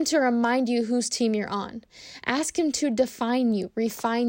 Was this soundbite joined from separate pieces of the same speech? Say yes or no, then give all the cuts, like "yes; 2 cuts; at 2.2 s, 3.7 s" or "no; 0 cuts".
no; 0 cuts